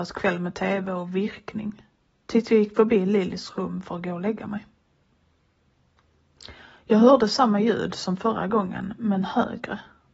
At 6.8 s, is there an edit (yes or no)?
no